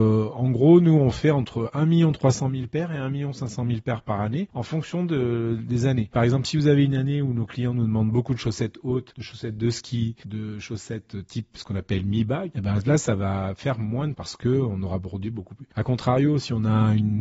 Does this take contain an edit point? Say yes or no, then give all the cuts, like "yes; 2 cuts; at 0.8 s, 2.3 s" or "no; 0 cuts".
yes; 2 cuts; at 12.5 s, 14.1 s